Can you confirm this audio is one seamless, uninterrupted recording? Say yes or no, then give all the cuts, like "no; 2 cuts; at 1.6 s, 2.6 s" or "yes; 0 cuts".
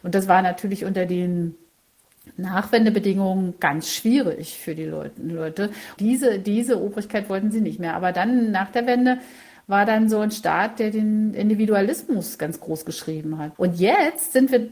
no; 2 cuts; at 6.0 s, 13.5 s